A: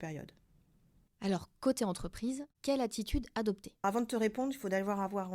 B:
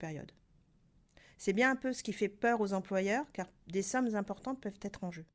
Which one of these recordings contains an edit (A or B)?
A